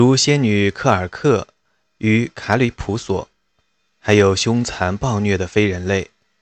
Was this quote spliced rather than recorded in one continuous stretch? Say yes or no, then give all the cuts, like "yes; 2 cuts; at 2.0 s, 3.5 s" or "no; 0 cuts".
no; 0 cuts